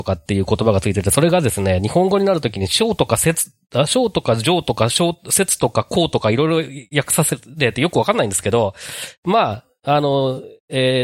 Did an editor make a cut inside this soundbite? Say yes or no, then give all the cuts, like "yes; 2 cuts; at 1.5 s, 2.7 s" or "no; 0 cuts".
no; 0 cuts